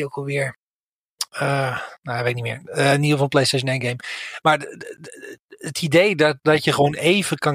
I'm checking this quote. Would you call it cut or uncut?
uncut